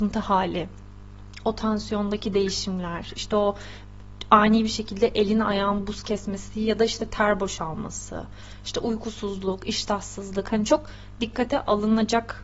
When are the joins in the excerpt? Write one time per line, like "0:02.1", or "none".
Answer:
none